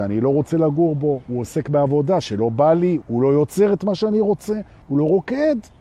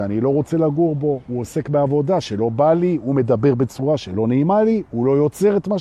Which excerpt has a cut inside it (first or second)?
first